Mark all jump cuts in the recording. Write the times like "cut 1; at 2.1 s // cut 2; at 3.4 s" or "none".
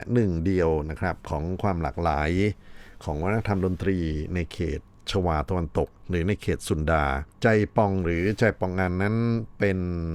cut 1; at 7.3 s